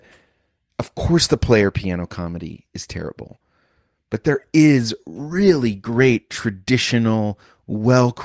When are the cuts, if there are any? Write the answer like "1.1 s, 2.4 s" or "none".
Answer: none